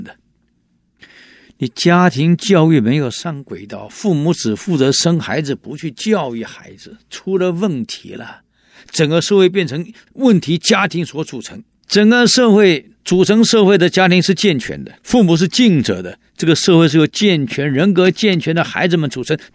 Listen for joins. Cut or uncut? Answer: cut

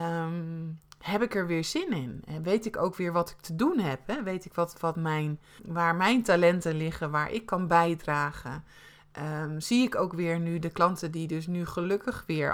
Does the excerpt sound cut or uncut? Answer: cut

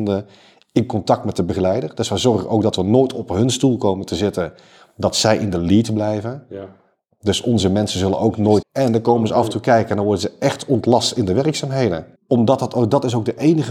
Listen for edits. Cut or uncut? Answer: cut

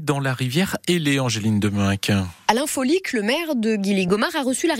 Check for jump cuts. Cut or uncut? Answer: uncut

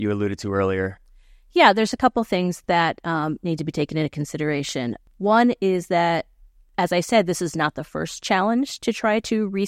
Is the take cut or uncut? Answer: uncut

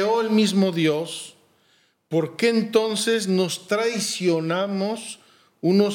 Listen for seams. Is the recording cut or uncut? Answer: uncut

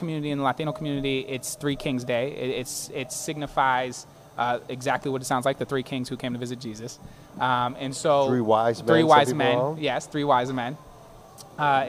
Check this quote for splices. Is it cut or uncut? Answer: uncut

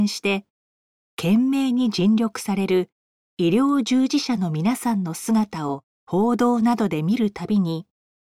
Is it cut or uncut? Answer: cut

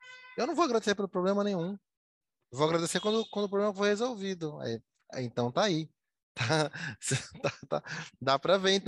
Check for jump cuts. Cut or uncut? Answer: uncut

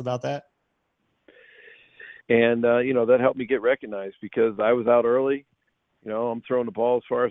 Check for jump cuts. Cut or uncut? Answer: cut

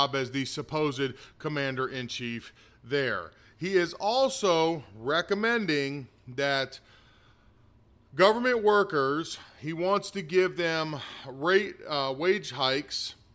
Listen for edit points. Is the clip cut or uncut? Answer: uncut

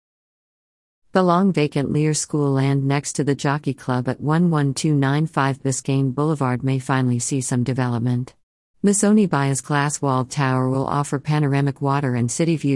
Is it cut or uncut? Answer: cut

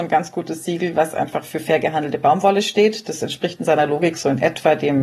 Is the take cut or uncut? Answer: uncut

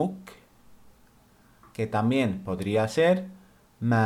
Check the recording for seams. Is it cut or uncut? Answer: cut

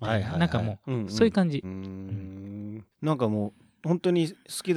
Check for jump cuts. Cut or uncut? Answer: cut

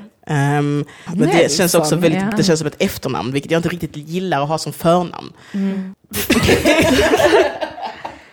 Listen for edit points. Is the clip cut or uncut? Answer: cut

